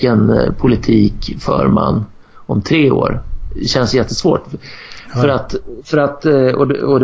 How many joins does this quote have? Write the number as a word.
zero